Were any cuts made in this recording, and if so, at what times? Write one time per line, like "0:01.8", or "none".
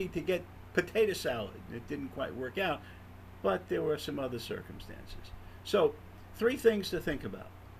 none